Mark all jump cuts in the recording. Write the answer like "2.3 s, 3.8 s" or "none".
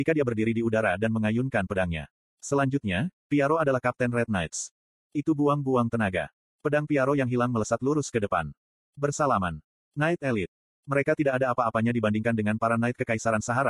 2.2 s, 8.7 s